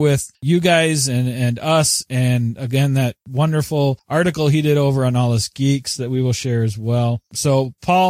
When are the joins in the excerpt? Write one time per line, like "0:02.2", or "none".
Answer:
none

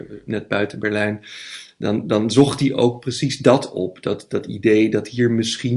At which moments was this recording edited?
none

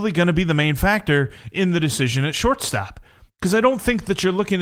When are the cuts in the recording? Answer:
none

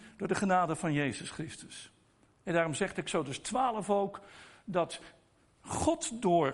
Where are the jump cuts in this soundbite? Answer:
none

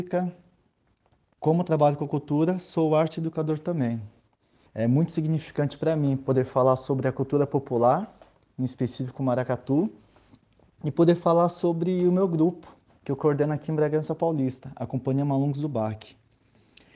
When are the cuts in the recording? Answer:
0:01.3
0:04.7

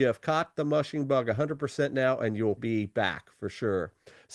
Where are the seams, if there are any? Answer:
0:02.6

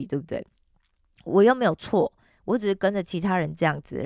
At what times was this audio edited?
none

